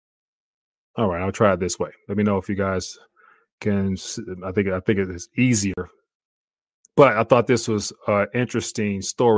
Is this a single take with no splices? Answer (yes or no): yes